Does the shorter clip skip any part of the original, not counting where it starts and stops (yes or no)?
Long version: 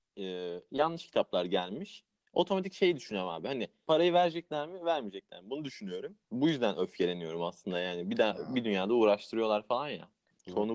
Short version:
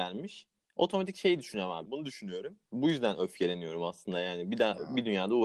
yes